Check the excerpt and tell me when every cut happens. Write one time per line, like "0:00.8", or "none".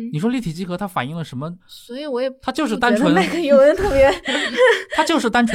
0:01.6